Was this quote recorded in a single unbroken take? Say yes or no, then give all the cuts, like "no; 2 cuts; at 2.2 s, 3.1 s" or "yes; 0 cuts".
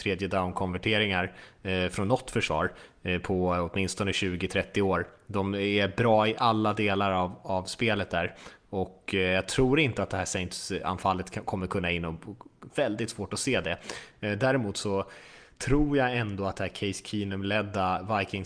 no; 1 cut; at 12.7 s